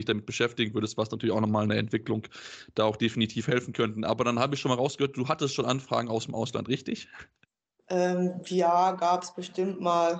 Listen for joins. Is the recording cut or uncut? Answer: uncut